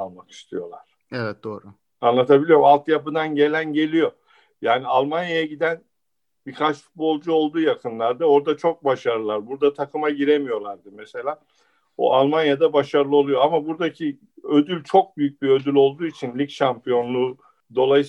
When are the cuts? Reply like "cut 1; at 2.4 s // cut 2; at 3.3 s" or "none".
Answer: none

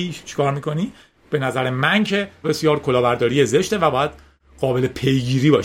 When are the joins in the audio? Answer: cut 1; at 2.4 s

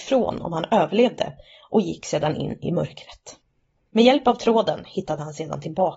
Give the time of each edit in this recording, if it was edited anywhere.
cut 1; at 3.8 s

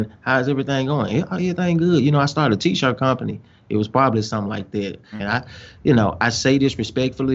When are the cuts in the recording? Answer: cut 1; at 5.2 s

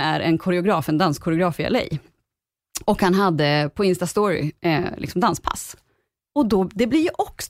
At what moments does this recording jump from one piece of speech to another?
none

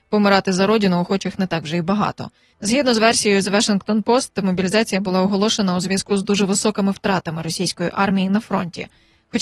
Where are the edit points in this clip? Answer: cut 1; at 2.5 s

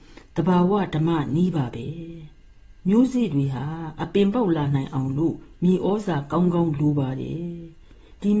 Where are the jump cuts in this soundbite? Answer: cut 1; at 2.8 s

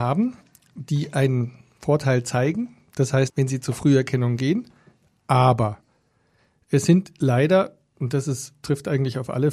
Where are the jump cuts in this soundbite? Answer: cut 1; at 3.3 s

